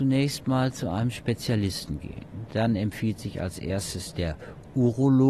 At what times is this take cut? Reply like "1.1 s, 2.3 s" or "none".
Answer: none